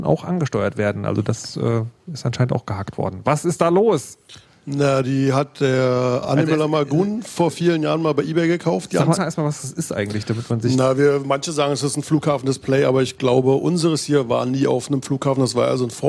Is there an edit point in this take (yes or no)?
yes